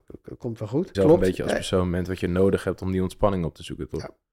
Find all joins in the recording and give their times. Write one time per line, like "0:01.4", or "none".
0:00.9

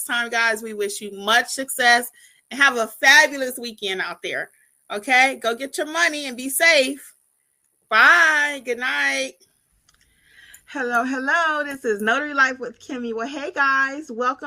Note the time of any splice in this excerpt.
none

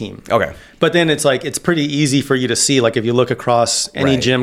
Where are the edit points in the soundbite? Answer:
none

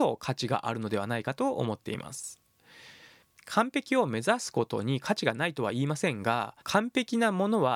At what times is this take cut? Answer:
0:06.6

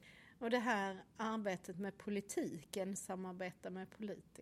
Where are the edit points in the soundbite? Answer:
0:02.9

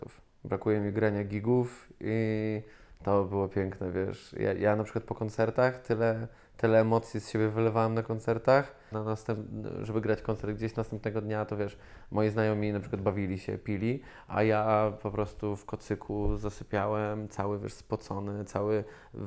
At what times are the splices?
0:08.9

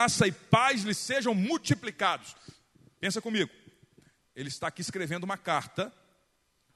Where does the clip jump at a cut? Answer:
none

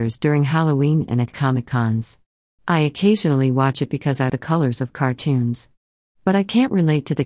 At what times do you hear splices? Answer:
0:02.6
0:04.3

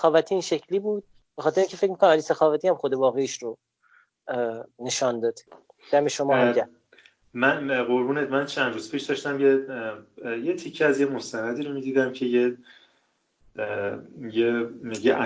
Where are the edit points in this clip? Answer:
none

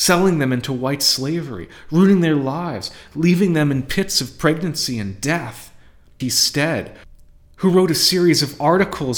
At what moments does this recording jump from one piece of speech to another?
0:06.2

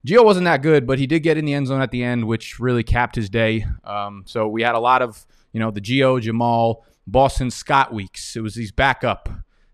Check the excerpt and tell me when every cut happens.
none

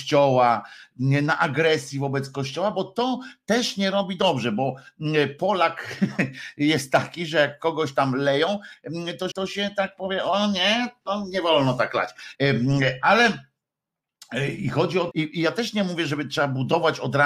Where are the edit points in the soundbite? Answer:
0:09.3
0:12.3
0:15.1

